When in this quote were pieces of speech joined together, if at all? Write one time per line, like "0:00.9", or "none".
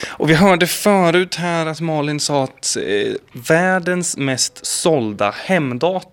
none